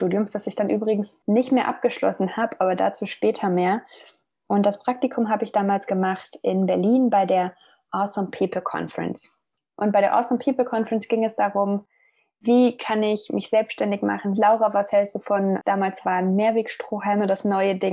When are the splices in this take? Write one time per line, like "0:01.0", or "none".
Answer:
0:14.3
0:15.6